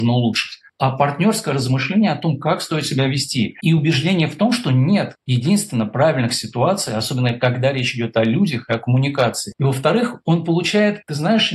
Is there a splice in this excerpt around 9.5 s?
yes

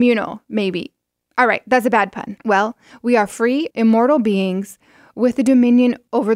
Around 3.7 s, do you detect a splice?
yes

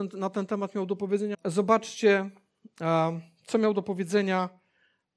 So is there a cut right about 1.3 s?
yes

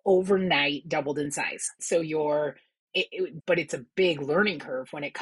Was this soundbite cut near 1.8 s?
yes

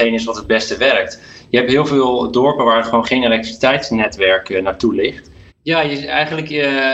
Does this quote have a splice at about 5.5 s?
yes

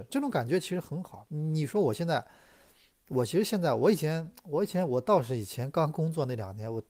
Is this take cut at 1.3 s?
no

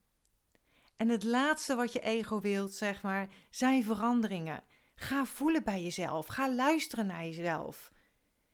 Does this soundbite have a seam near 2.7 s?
no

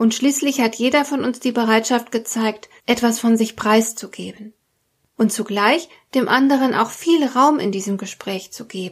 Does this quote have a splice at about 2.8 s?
yes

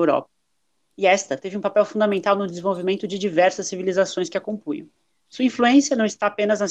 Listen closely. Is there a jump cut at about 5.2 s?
no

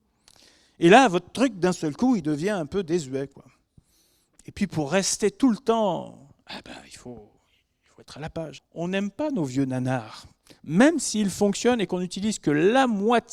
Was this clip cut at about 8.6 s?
yes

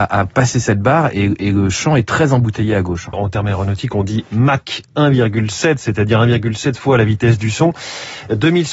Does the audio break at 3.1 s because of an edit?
yes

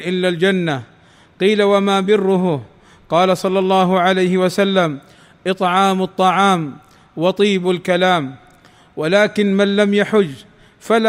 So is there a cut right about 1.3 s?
no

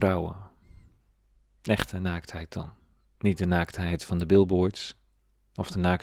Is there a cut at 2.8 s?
no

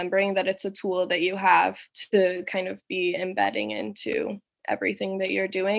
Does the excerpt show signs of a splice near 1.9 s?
yes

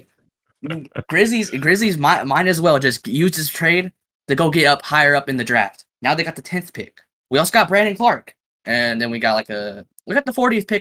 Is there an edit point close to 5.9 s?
no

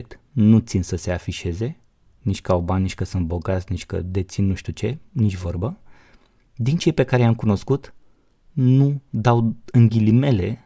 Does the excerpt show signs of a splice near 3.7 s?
no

